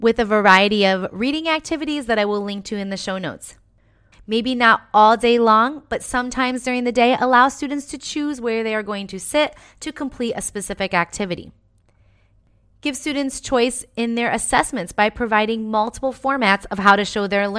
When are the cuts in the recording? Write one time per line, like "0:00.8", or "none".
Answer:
0:04.1